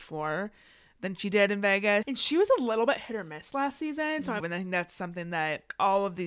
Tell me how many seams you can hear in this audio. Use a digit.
2